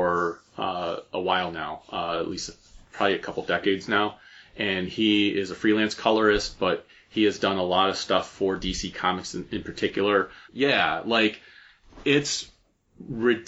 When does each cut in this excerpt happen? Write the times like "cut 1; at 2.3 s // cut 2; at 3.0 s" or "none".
cut 1; at 10.5 s